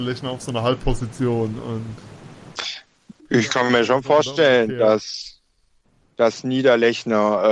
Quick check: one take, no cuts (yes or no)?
yes